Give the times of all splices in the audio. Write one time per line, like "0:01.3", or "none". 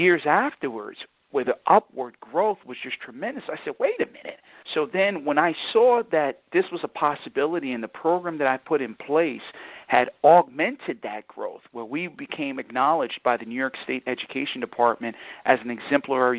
0:04.6